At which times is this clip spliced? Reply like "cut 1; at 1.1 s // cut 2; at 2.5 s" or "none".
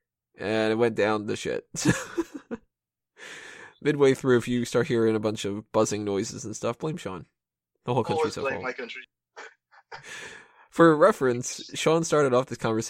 cut 1; at 7.7 s // cut 2; at 9.0 s